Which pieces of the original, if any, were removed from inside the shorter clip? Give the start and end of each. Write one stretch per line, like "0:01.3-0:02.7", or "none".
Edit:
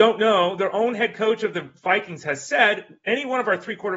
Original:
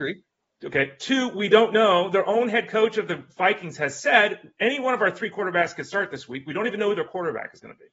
none